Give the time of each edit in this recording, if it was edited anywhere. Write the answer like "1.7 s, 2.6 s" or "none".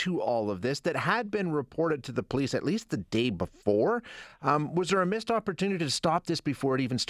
none